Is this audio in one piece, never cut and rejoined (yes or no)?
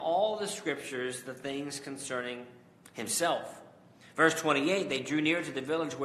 yes